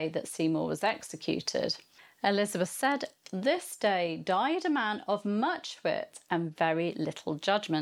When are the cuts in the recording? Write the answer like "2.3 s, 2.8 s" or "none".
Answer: none